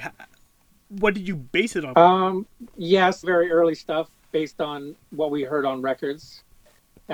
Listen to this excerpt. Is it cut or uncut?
cut